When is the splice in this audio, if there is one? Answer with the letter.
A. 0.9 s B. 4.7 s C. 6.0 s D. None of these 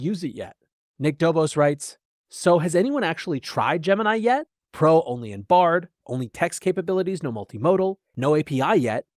C